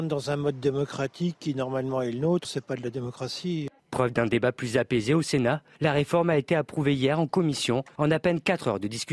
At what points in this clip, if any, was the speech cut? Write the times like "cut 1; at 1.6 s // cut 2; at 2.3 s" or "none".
cut 1; at 2.4 s // cut 2; at 3.8 s